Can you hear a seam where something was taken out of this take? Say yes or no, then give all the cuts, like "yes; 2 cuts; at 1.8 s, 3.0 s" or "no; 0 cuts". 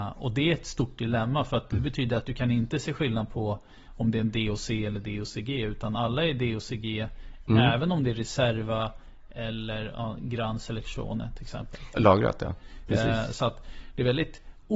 yes; 1 cut; at 11.9 s